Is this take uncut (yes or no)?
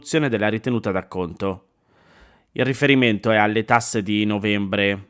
yes